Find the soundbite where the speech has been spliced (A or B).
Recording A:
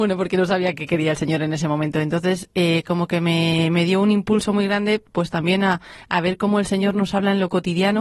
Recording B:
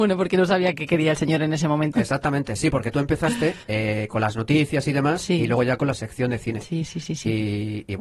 B